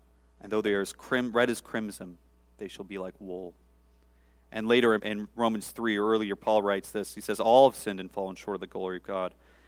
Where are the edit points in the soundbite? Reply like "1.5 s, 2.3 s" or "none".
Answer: 5.0 s